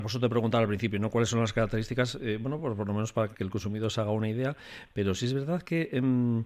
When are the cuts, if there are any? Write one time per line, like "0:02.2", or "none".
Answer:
none